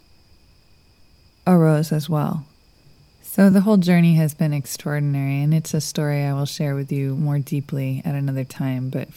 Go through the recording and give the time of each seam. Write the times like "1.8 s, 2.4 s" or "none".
none